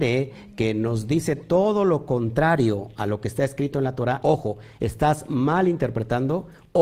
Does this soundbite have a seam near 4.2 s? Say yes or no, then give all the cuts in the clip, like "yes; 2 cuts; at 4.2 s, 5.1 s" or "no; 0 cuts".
yes; 1 cut; at 4.2 s